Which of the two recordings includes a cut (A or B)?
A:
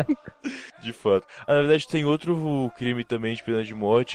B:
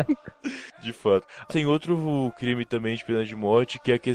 B